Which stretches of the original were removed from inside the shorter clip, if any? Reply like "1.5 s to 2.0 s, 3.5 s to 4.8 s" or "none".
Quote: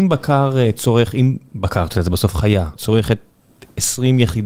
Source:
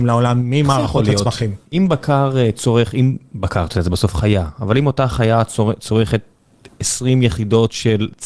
4.5 s to 5.7 s